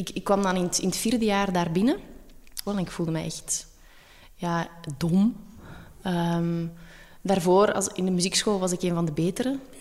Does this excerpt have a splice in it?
yes; 1 cut; at 2.7 s

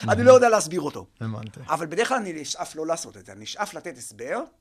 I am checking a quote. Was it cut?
no; 0 cuts

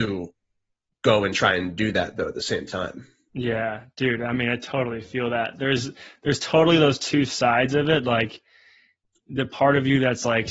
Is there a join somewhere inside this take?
no; 0 cuts

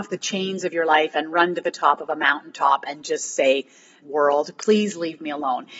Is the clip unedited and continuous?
no; 1 cut; at 4.0 s

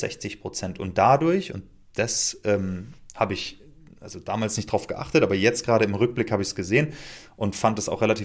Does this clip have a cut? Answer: no; 0 cuts

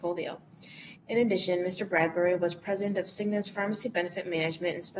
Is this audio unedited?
no; 1 cut; at 1.0 s

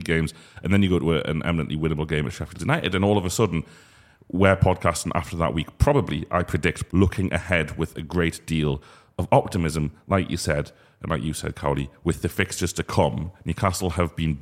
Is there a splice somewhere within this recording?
yes; 1 cut; at 6.9 s

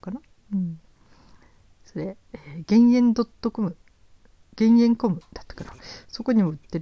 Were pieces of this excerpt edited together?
no; 0 cuts

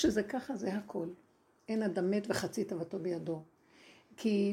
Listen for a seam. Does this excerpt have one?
yes; 1 cut; at 1.6 s

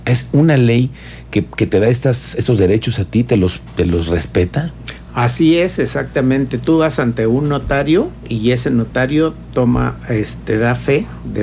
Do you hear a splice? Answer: no; 0 cuts

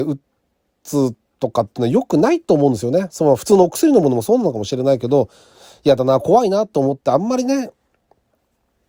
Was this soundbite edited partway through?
no; 0 cuts

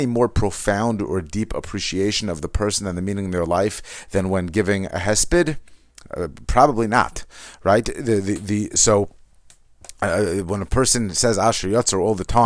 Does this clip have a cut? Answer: no; 0 cuts

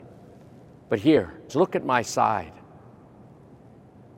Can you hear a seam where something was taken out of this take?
yes; 1 cut; at 1.5 s

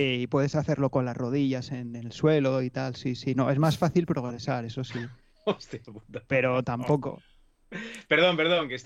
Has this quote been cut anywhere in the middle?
no; 0 cuts

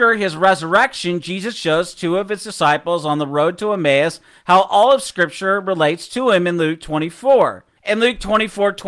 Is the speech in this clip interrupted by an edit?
yes; 1 cut; at 7.8 s

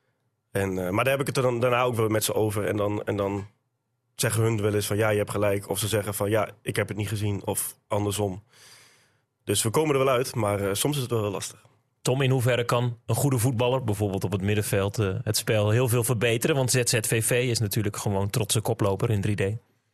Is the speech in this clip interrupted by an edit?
no; 0 cuts

